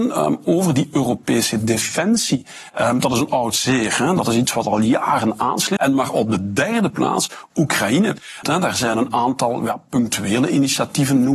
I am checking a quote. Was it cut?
yes; 2 cuts; at 5.8 s, 8.4 s

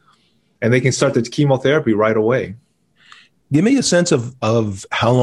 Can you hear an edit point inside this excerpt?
no; 0 cuts

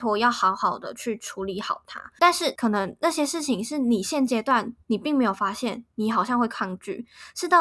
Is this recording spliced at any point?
yes; 1 cut; at 2.2 s

